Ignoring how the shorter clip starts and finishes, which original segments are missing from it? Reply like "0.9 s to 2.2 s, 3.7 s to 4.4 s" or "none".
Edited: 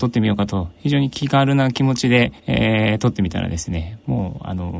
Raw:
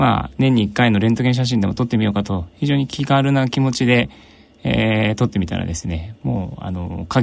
4.2 s to 4.6 s